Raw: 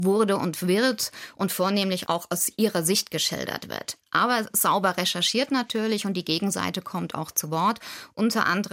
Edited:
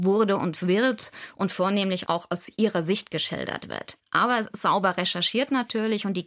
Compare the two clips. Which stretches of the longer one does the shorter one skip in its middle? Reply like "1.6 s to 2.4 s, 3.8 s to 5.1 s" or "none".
none